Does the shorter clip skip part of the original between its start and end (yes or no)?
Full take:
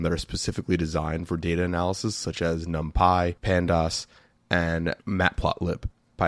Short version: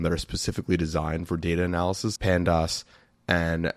yes